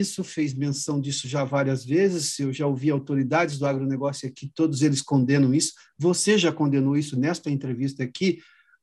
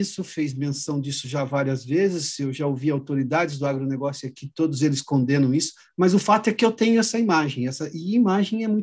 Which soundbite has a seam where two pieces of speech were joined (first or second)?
second